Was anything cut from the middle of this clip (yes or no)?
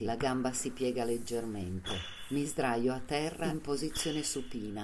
no